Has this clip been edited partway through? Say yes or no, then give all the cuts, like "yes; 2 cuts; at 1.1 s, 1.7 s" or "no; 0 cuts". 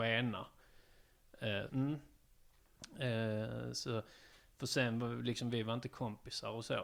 yes; 1 cut; at 1.7 s